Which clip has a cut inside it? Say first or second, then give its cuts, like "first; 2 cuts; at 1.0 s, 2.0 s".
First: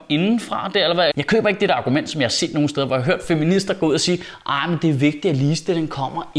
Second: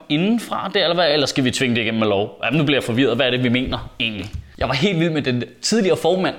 first; 1 cut; at 1.1 s